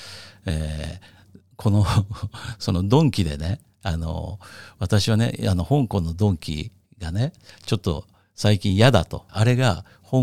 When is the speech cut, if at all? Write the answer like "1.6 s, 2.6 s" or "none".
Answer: 9.3 s